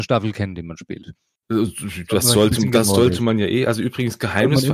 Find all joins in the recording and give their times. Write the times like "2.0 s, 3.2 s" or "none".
none